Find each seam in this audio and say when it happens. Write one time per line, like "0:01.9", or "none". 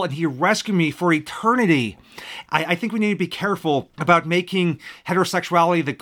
0:02.5
0:03.9